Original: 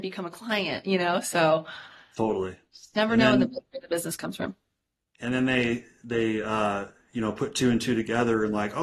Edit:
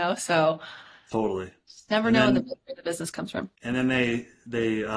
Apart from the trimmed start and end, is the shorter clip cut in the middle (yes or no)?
yes